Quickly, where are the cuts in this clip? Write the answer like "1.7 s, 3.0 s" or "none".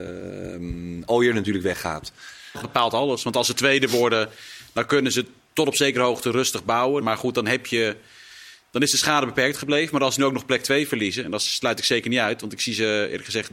2.5 s, 7.0 s